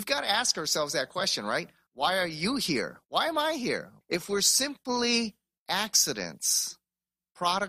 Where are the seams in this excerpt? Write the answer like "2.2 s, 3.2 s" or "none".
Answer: 1.9 s, 4.0 s